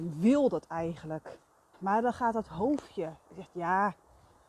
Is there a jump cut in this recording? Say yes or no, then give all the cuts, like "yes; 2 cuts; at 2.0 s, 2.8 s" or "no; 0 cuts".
yes; 1 cut; at 1.7 s